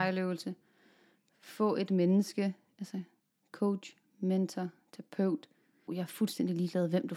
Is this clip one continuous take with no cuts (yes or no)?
no